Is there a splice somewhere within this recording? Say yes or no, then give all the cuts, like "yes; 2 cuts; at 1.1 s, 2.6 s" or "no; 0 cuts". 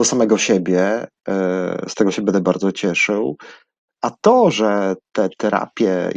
no; 0 cuts